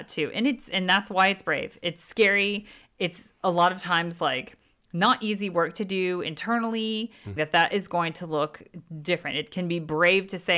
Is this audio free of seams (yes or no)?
no